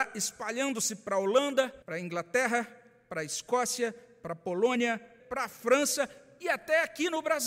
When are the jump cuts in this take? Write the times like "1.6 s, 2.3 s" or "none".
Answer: 1.8 s, 5.2 s